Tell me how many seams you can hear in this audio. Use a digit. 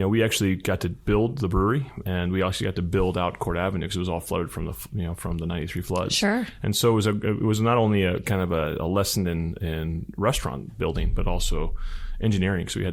0